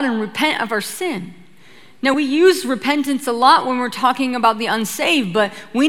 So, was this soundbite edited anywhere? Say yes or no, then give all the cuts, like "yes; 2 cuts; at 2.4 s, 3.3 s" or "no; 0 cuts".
no; 0 cuts